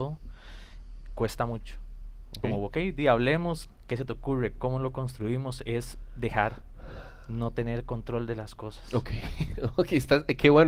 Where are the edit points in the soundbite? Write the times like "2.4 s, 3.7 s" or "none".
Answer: 2.4 s